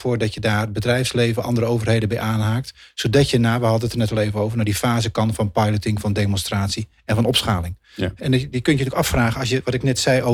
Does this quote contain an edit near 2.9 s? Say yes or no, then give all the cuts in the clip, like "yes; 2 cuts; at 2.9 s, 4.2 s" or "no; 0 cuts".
no; 1 cut; at 8.2 s